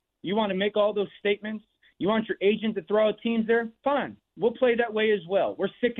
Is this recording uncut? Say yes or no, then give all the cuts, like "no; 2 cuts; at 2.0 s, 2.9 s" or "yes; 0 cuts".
yes; 0 cuts